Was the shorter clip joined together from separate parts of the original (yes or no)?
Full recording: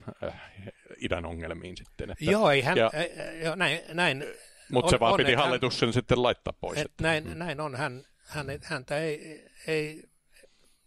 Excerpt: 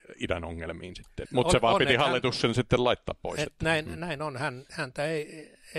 yes